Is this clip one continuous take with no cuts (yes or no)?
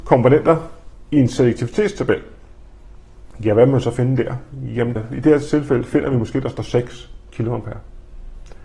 no